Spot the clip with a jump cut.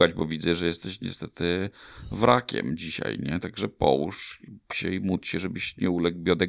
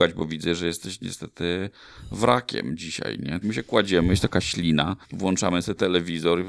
second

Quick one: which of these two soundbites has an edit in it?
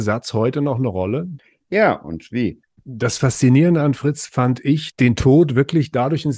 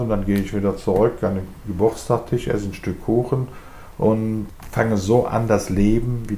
first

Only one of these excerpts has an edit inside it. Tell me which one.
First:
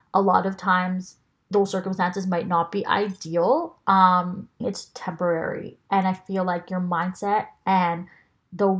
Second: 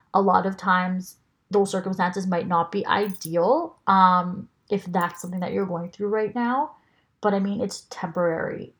first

